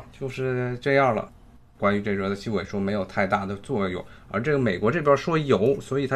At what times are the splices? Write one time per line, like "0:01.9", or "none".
0:01.8